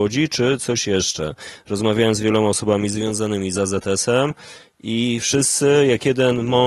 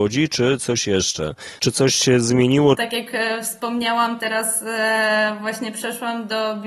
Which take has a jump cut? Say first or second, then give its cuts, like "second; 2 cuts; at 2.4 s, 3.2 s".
second; 2 cuts; at 1.6 s, 2.8 s